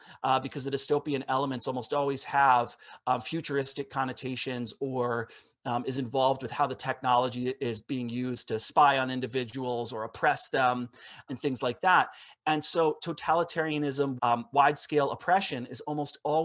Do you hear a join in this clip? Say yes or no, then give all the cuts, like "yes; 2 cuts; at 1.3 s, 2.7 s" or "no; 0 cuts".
yes; 2 cuts; at 11.3 s, 14.2 s